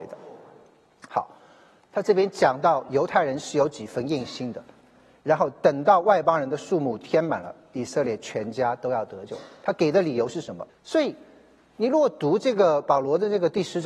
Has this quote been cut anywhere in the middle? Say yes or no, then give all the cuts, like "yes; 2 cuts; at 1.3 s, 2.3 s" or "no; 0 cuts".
yes; 1 cut; at 10.7 s